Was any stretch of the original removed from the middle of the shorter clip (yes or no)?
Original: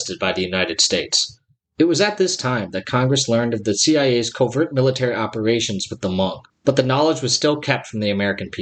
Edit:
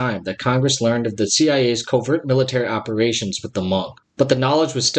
no